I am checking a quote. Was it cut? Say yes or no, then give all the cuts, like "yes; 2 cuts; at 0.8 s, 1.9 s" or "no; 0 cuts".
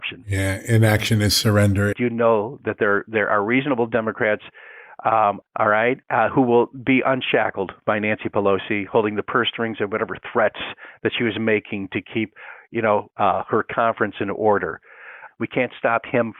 yes; 3 cuts; at 1.9 s, 5.4 s, 15.3 s